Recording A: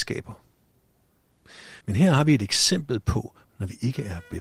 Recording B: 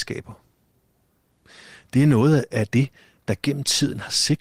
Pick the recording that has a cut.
A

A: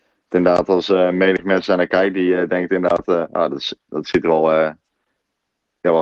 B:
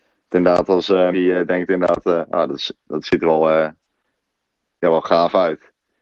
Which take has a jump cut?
B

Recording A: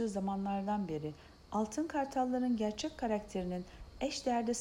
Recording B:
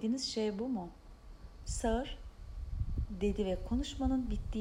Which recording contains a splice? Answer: B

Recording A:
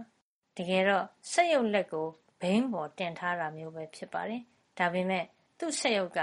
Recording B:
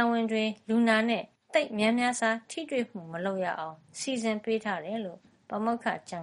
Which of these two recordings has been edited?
B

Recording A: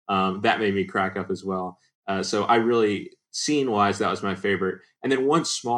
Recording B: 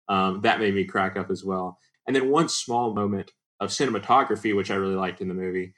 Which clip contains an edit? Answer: B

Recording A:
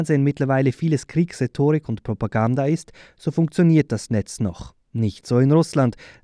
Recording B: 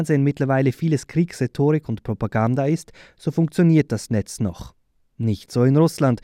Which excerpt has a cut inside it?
A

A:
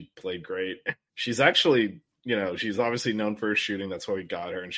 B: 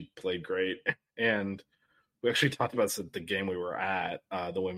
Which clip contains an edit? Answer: A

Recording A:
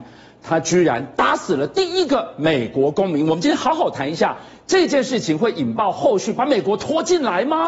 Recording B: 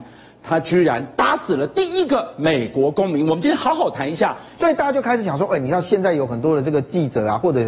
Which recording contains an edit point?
B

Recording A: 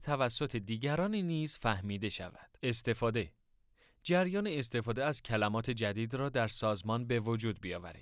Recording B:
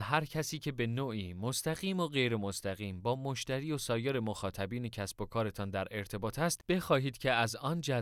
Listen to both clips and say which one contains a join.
A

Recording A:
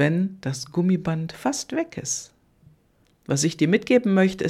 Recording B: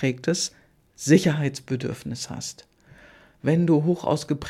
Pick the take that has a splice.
A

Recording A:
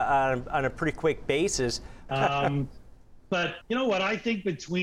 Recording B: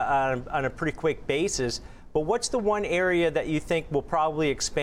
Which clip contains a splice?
A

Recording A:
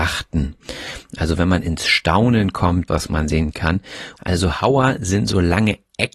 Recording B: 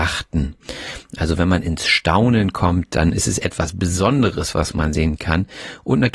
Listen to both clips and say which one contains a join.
A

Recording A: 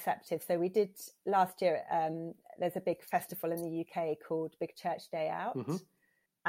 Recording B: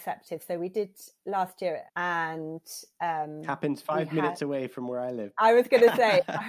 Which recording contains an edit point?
B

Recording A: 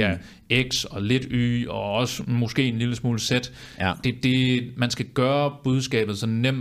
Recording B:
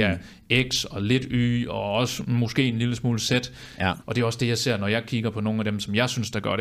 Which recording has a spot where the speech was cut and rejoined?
B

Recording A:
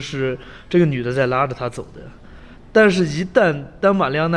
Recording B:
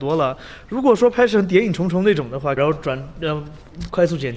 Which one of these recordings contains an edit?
B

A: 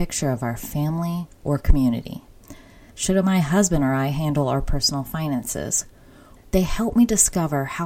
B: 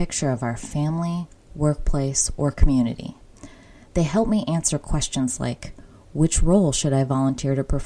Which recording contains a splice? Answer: A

